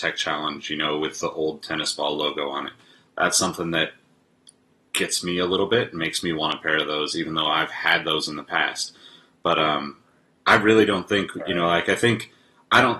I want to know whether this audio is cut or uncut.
uncut